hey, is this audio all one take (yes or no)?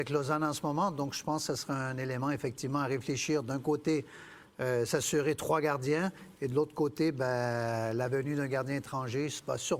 yes